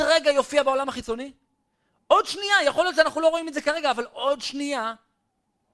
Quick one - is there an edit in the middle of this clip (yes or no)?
no